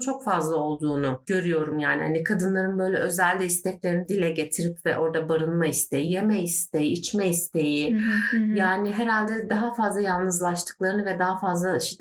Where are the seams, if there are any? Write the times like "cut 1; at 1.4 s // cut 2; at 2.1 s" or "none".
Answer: none